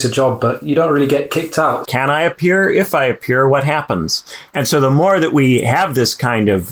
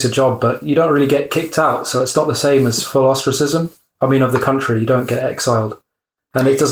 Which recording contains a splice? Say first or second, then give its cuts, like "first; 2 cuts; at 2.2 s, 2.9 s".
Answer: first; 2 cuts; at 1.8 s, 4.5 s